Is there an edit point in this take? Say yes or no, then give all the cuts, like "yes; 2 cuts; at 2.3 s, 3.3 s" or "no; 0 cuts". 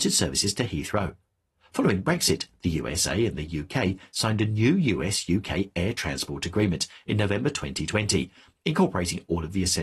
no; 0 cuts